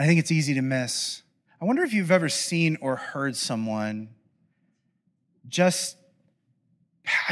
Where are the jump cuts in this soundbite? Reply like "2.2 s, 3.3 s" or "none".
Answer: 1.5 s